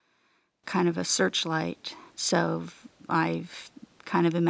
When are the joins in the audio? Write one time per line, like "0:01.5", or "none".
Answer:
0:02.1